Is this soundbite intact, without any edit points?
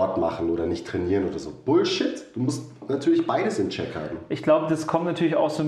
yes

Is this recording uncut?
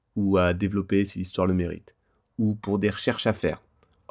yes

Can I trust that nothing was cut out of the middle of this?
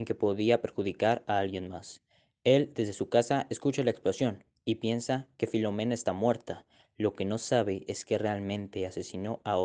yes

